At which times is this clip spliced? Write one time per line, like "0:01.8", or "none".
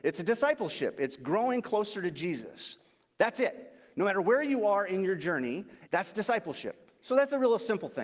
0:05.9